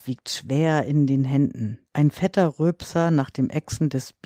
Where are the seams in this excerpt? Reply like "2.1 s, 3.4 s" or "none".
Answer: 1.9 s